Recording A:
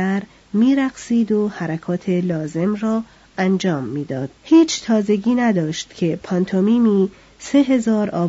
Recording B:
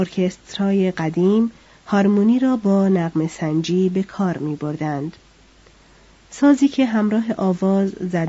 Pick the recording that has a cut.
A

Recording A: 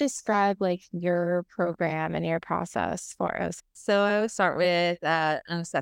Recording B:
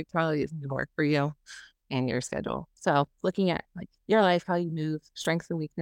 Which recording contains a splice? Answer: A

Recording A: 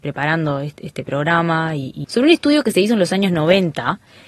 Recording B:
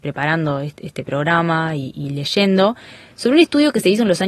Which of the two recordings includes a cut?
A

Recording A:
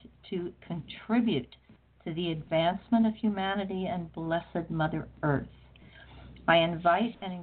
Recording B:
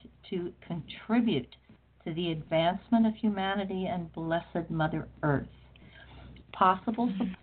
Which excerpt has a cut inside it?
B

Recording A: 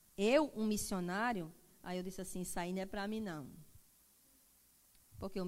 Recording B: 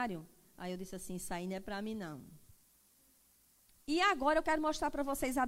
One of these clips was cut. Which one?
B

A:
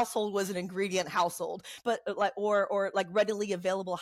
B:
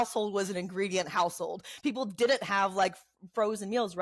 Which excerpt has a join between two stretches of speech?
A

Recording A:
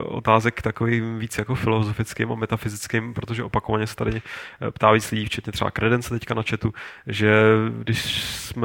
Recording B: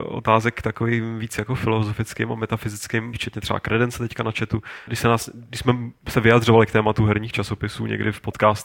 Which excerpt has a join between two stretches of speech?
B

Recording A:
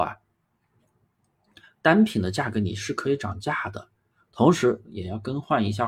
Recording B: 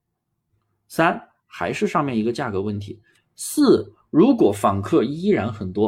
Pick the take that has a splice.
B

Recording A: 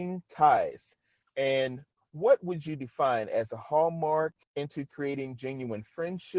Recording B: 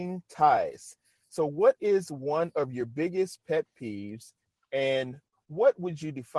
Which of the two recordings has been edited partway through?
A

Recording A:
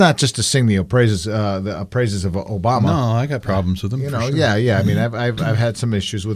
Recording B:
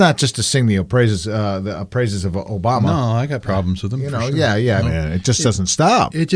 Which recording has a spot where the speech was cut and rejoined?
B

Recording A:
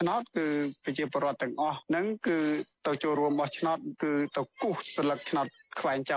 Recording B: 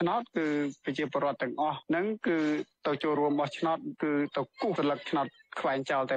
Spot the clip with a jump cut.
B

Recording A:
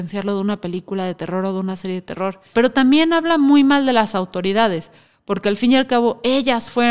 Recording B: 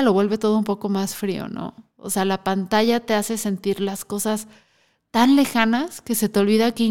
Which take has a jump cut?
A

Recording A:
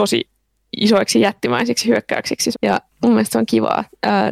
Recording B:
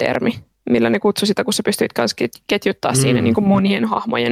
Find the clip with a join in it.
A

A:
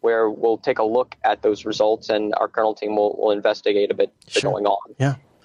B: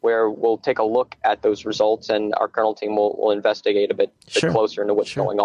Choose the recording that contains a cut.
A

